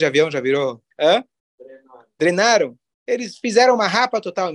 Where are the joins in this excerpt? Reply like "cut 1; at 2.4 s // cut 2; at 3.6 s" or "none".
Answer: cut 1; at 0.9 s